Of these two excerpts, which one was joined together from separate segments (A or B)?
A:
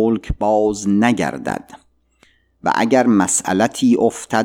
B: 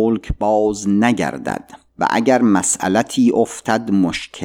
B